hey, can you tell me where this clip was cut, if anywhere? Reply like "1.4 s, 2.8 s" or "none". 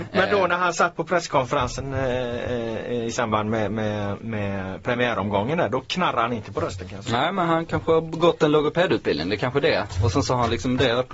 none